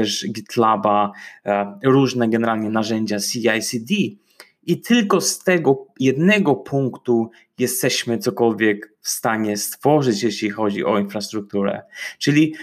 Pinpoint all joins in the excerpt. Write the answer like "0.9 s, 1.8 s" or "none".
none